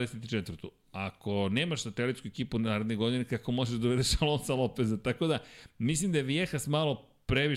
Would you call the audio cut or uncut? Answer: uncut